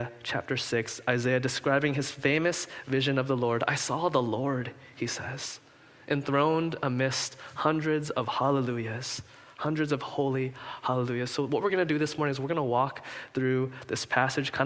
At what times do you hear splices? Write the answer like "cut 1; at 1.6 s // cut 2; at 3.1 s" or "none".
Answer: none

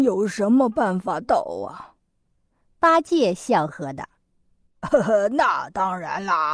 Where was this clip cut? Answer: cut 1; at 3.7 s

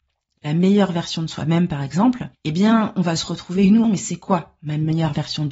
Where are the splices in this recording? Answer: cut 1; at 2.3 s // cut 2; at 3.8 s

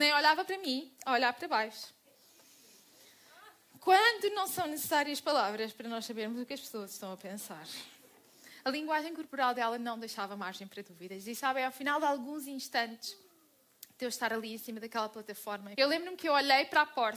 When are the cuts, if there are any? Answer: cut 1; at 15.7 s

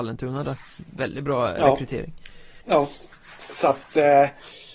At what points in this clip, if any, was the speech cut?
cut 1; at 2.6 s

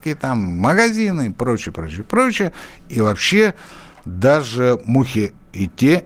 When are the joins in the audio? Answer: none

